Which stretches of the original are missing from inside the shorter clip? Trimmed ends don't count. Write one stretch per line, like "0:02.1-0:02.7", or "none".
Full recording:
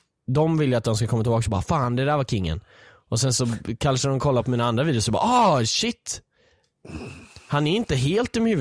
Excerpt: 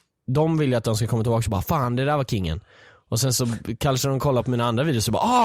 none